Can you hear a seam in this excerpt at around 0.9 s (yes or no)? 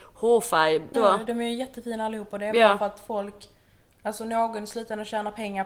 yes